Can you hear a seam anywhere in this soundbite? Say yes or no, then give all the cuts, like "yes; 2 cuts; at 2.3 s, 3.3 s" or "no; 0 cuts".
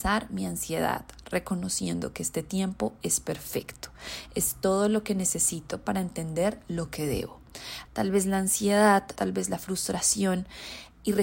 yes; 2 cuts; at 7.9 s, 9.2 s